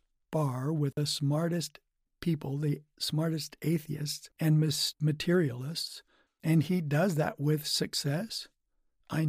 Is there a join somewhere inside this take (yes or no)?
yes